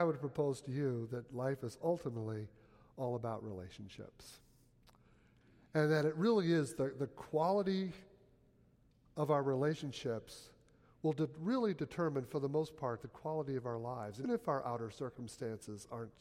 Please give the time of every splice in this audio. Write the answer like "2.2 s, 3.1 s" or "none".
14.2 s

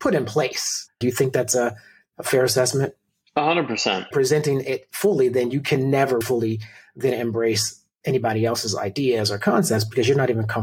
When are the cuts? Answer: 1.0 s, 4.1 s, 6.2 s

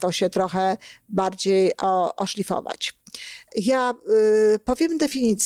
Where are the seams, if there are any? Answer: 3.5 s

